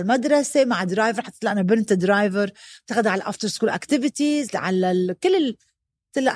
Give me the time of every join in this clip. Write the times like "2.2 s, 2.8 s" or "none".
4.5 s